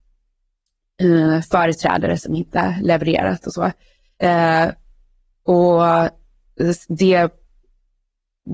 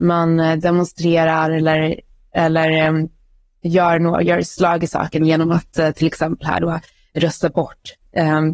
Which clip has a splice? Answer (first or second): first